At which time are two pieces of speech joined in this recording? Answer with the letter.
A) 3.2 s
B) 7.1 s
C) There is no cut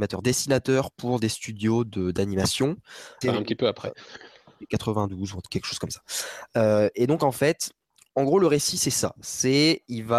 A